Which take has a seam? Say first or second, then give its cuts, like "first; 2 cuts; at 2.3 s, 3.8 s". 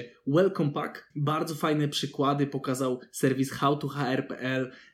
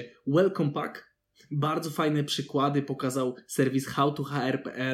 first; 1 cut; at 1.1 s